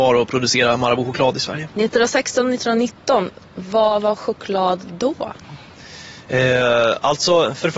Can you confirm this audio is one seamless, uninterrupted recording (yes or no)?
no